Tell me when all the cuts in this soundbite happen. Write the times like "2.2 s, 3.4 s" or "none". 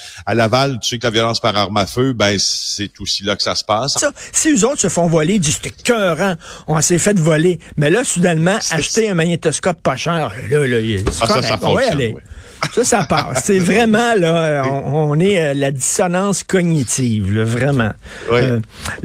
4.0 s